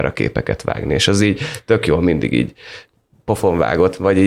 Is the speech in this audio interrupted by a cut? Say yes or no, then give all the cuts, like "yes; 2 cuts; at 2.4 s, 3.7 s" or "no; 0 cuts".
no; 0 cuts